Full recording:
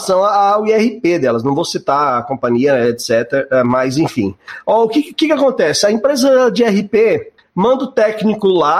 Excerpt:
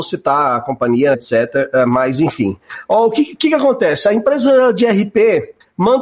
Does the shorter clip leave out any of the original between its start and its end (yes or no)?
yes